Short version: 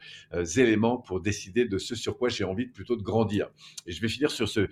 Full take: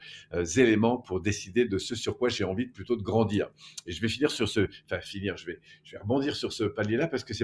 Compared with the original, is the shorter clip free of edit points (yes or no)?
yes